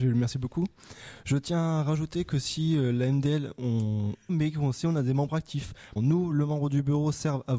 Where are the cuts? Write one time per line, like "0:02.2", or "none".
0:04.3
0:06.0